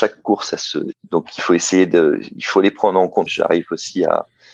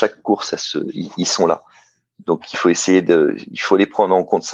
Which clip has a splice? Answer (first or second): first